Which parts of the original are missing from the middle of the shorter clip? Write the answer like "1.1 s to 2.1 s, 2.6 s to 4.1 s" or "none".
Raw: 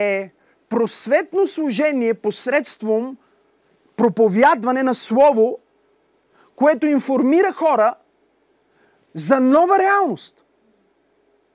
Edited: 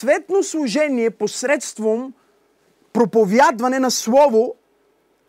none